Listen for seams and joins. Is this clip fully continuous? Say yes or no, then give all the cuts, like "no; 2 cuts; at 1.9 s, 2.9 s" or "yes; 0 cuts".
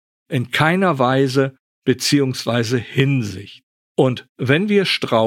yes; 0 cuts